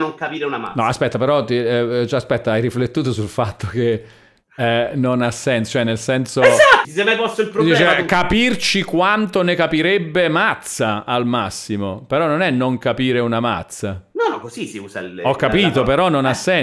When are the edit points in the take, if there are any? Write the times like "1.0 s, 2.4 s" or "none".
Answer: 6.8 s